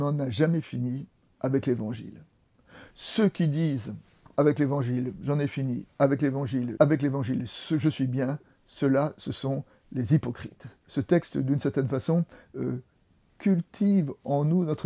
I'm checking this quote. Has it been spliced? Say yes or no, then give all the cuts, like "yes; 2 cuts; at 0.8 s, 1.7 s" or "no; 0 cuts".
yes; 2 cuts; at 6.8 s, 10.8 s